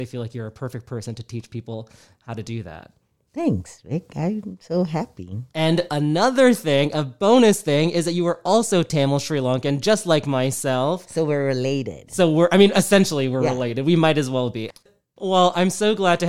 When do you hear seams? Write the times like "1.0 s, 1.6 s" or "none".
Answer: none